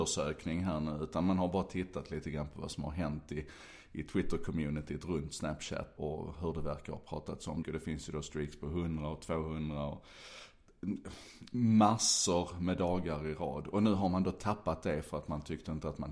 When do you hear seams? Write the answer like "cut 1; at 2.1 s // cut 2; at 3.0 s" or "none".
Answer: cut 1; at 6.0 s // cut 2; at 7.6 s